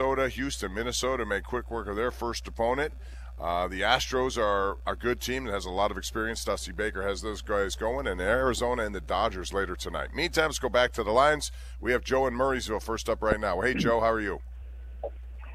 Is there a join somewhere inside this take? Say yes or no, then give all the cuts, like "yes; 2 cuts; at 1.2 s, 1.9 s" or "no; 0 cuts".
no; 0 cuts